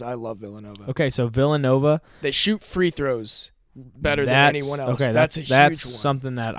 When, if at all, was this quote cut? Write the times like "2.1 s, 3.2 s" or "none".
none